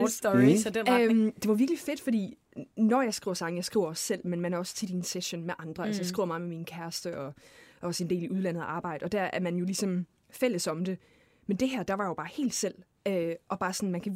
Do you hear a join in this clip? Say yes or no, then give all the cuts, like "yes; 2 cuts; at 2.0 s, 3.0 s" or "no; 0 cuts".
no; 0 cuts